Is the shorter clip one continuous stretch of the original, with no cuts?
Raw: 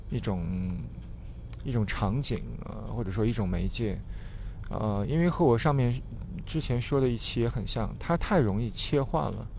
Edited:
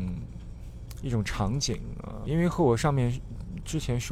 no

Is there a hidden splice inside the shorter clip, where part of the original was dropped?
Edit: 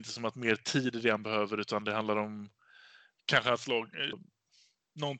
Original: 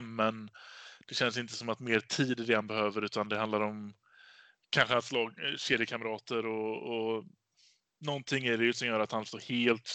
yes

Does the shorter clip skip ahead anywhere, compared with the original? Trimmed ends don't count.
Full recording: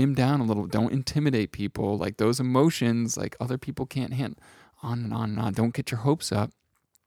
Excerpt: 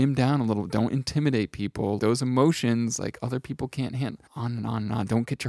yes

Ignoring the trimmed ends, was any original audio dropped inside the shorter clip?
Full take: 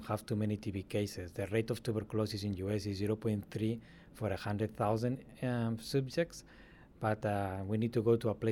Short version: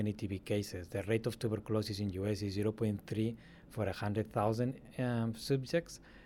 no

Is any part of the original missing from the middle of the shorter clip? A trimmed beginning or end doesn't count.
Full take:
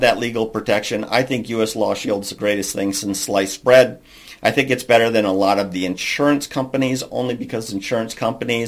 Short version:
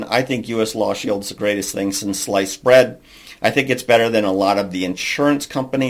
no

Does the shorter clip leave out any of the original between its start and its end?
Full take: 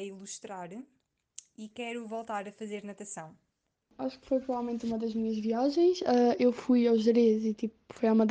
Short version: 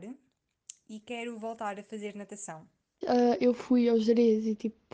yes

